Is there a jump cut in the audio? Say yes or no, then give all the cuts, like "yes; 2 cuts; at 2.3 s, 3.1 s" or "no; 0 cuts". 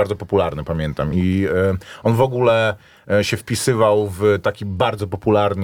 no; 0 cuts